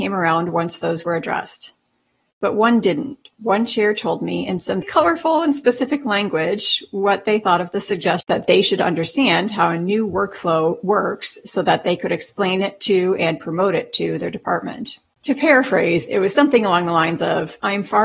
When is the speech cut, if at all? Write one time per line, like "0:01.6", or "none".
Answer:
0:04.8